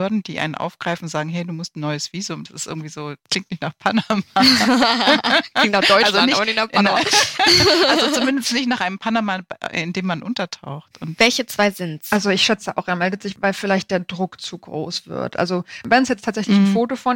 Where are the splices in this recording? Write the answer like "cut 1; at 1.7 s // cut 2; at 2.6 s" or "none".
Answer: none